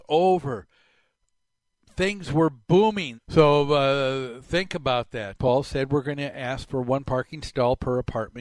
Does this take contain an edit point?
yes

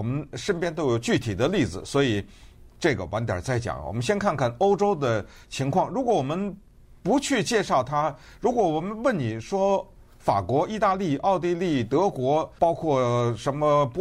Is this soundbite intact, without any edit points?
yes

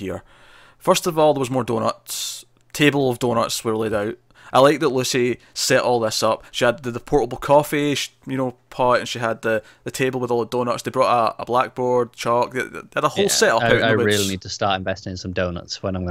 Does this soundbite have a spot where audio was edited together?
no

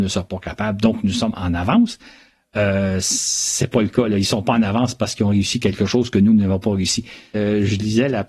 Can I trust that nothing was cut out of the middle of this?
no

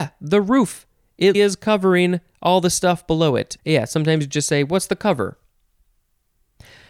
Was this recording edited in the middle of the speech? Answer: yes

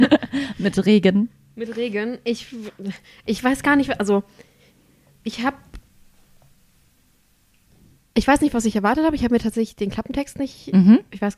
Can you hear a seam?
no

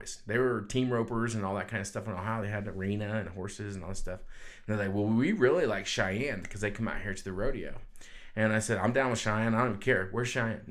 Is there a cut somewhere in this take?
no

